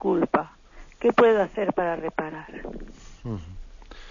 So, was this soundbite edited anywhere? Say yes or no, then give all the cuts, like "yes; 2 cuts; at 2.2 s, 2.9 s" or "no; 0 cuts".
no; 0 cuts